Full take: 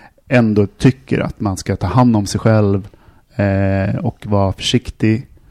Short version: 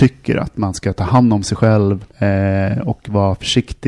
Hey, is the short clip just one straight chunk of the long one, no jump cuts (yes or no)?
no